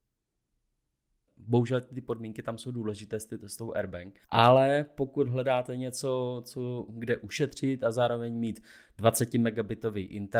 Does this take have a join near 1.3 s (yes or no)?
yes